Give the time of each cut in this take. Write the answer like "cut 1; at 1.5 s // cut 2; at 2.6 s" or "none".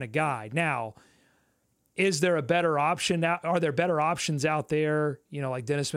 none